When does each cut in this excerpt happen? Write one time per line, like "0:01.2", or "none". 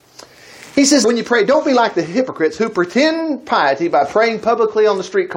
0:01.0